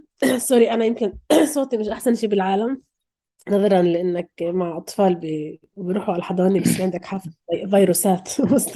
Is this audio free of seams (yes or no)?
yes